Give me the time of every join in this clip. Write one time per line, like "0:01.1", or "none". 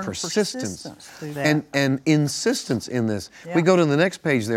none